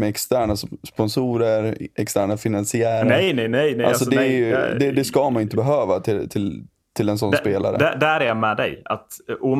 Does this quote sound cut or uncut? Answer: uncut